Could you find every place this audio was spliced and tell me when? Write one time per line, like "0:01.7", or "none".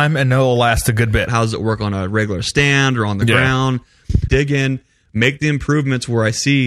0:01.3
0:04.3